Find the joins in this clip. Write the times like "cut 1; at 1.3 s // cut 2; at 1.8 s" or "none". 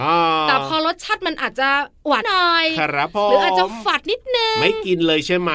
cut 1; at 2.2 s